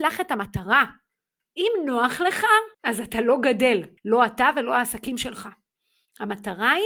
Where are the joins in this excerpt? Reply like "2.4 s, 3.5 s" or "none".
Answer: 1.4 s, 2.7 s, 4.0 s